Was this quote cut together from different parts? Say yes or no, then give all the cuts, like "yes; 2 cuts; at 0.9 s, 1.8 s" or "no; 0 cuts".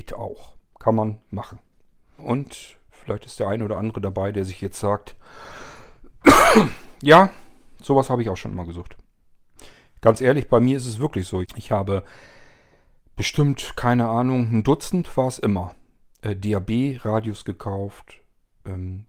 yes; 2 cuts; at 2.2 s, 11.4 s